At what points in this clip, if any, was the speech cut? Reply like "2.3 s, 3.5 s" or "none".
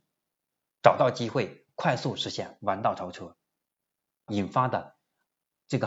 4.3 s